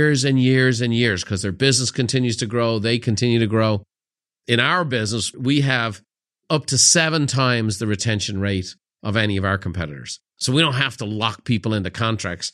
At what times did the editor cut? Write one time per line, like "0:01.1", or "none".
none